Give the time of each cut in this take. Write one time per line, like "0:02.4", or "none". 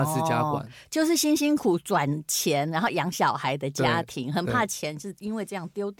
0:01.6